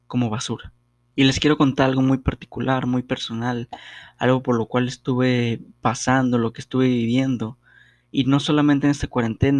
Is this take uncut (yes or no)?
no